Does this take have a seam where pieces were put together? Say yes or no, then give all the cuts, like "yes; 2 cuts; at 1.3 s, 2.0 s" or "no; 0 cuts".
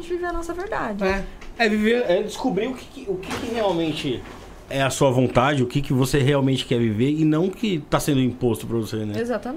yes; 1 cut; at 4.7 s